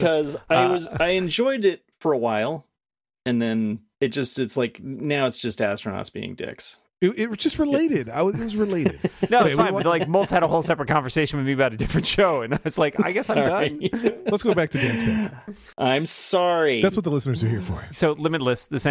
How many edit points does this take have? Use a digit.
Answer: 2